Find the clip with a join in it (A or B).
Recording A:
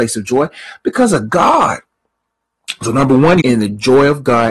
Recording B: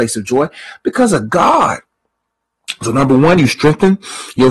A